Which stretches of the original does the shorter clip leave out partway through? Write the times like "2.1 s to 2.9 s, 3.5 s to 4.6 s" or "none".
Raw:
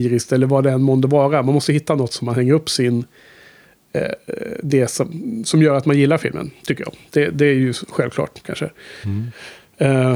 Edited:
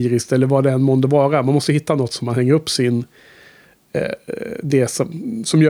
none